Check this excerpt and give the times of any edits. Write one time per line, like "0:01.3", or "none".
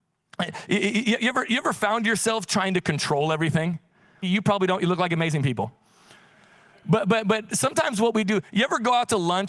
0:04.2

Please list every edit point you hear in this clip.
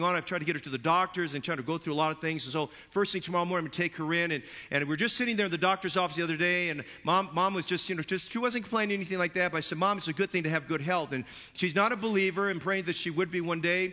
none

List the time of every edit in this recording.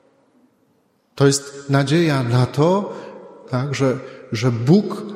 0:03.4

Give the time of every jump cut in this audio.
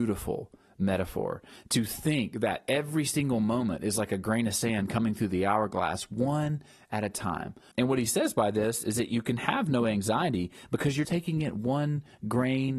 0:07.7
0:11.0

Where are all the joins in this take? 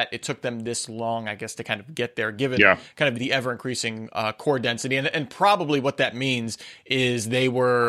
0:03.1

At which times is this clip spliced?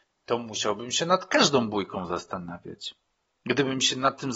none

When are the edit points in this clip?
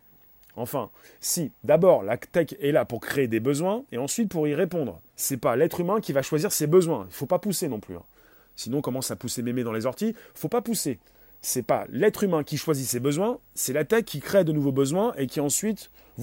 0:05.1

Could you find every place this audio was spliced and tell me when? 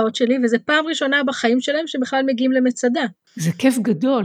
0:03.2

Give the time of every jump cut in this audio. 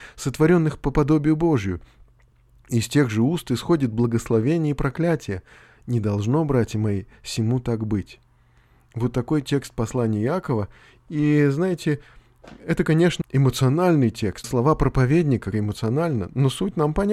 0:13.2
0:14.4
0:15.5

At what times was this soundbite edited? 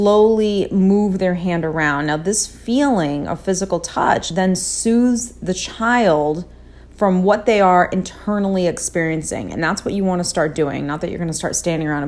none

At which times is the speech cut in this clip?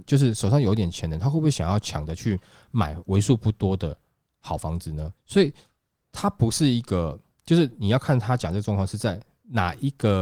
0:05.2

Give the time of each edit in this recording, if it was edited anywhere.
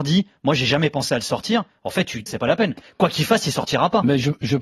0:02.3

